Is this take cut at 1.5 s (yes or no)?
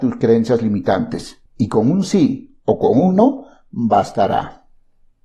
yes